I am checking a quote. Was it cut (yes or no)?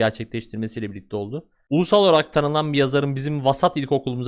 no